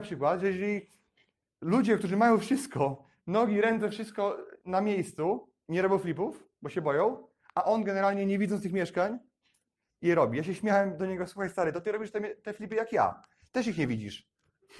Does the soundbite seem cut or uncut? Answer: cut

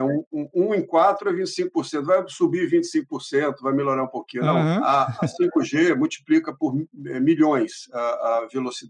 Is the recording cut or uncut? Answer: uncut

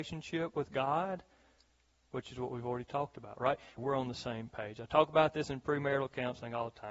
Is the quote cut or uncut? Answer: cut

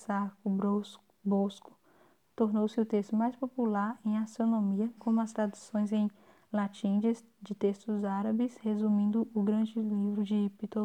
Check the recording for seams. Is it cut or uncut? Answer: cut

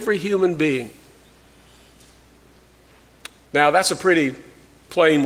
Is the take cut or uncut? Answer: cut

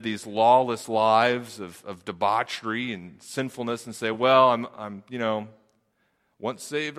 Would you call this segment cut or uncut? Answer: uncut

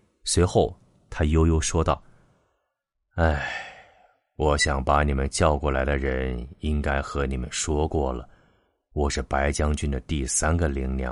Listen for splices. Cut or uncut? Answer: uncut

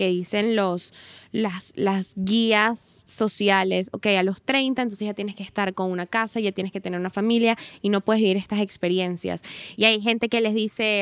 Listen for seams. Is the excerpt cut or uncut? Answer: cut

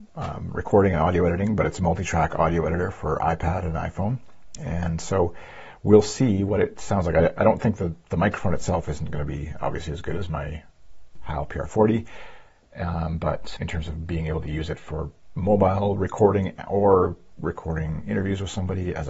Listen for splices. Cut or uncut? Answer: cut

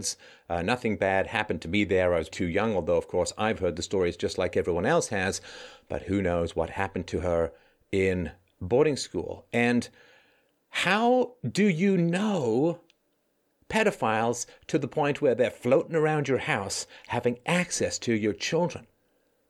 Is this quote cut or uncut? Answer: cut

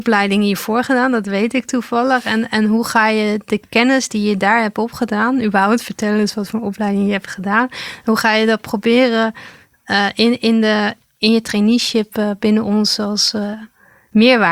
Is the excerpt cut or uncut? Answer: uncut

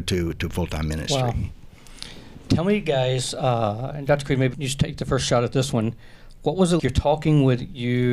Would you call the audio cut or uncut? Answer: cut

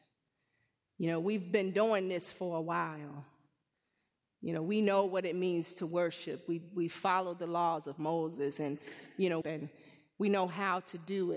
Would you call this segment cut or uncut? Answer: cut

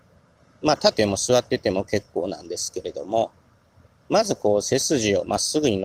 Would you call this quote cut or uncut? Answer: cut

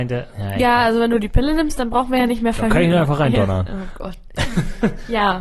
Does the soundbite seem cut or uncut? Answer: uncut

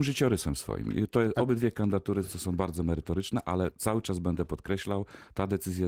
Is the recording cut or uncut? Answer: uncut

